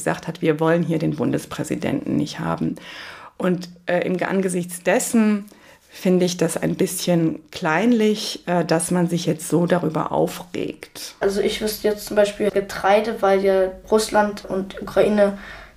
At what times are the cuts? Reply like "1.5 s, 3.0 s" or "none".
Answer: 11.2 s, 12.5 s